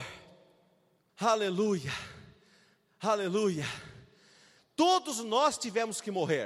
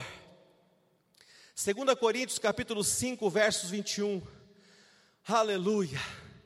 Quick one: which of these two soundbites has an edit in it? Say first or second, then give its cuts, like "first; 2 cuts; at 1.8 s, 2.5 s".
first; 2 cuts; at 1.1 s, 4.6 s